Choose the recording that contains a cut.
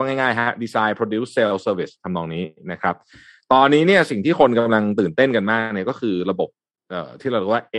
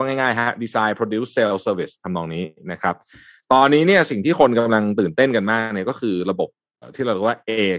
second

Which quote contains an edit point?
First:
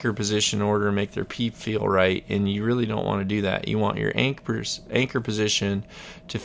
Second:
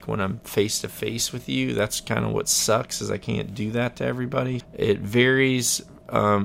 second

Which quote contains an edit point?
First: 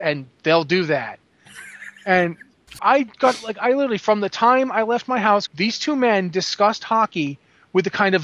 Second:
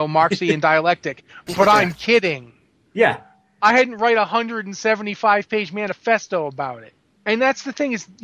first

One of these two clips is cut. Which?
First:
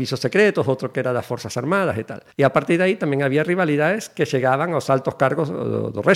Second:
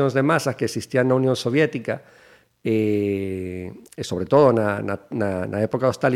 first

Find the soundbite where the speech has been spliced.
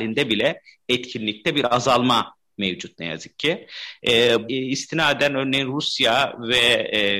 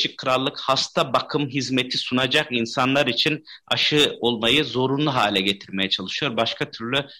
first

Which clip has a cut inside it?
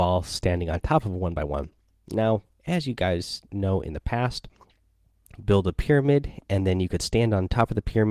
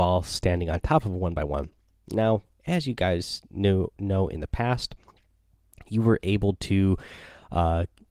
first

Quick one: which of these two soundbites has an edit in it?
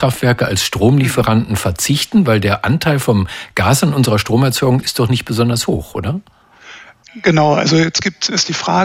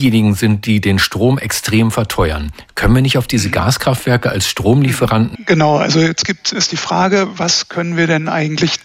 second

